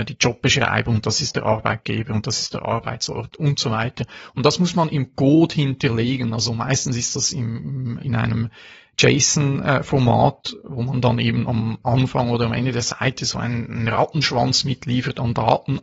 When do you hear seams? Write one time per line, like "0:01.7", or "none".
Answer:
0:08.0